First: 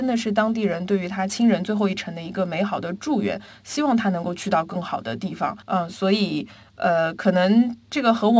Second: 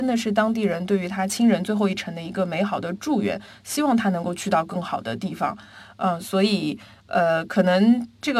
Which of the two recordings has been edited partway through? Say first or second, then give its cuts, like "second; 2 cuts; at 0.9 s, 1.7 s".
first; 1 cut; at 5.6 s